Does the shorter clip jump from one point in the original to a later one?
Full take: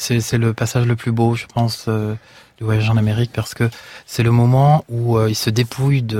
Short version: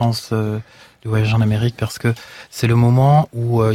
no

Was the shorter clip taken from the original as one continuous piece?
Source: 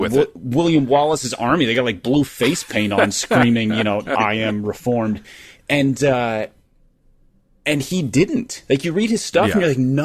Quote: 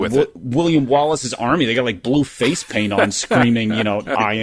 yes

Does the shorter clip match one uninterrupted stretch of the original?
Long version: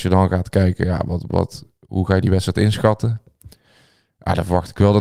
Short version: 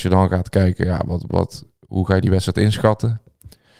yes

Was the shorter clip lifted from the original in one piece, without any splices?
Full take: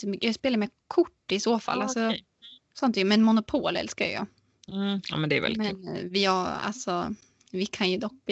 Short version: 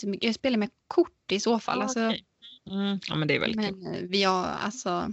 no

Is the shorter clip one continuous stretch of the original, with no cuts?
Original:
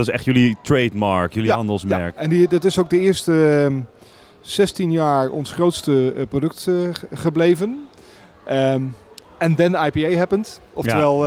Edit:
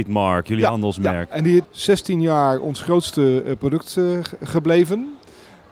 no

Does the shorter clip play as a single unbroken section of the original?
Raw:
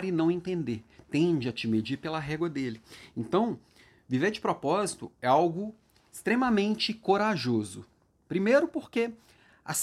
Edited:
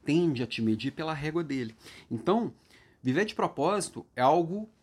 yes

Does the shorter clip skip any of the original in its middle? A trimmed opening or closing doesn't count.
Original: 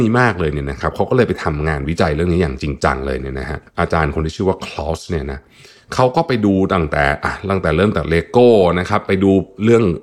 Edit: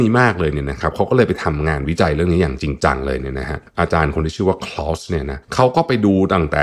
yes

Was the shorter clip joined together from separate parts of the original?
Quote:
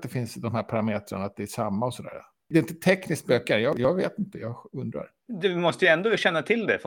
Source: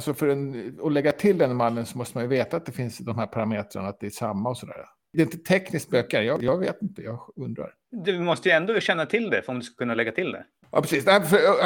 no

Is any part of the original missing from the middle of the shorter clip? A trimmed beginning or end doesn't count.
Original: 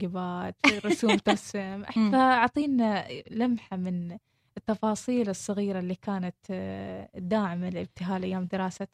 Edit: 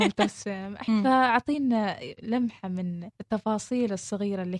yes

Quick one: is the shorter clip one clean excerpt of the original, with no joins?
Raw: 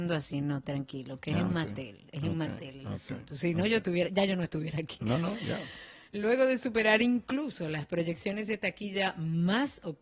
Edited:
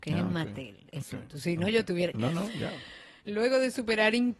no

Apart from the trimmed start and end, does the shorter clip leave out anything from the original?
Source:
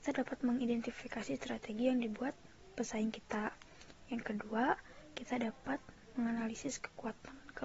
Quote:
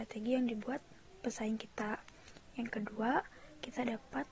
no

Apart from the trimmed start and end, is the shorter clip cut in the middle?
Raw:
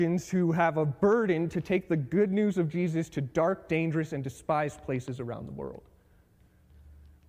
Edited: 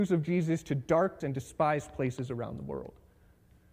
yes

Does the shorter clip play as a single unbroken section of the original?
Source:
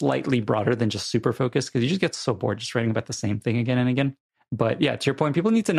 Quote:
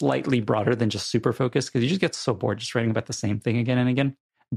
yes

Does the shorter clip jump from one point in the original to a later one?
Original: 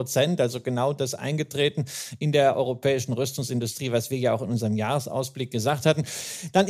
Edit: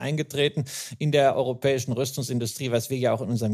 no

